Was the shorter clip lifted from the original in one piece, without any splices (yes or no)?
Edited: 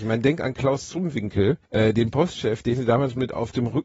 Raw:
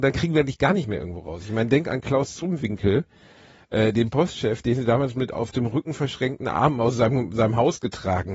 no